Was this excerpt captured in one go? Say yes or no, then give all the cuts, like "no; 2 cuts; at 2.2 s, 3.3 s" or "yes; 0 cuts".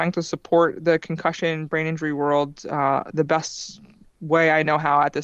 yes; 0 cuts